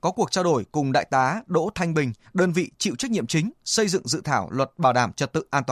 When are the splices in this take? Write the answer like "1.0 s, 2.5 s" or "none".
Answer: 2.2 s

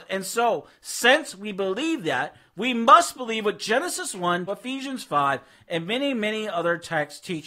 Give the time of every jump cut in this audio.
4.5 s

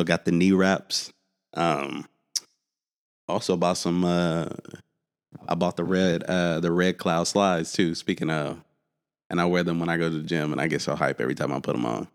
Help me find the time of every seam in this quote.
none

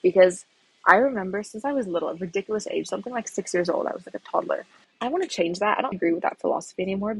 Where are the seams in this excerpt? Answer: 4.8 s, 5.9 s

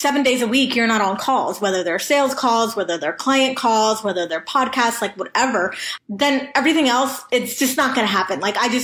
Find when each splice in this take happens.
6.0 s

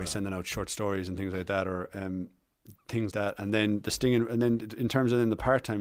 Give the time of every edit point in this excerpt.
3.1 s

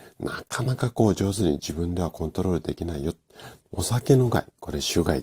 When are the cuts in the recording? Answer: 3.6 s

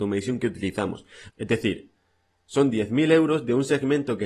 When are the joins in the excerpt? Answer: 1.3 s

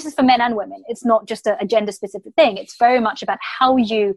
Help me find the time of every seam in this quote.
none

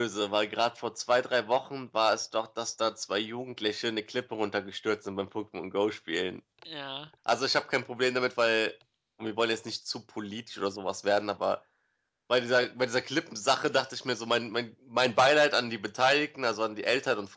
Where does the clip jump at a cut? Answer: 7.2 s

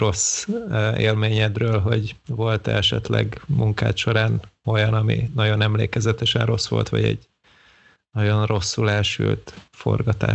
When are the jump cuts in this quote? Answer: none

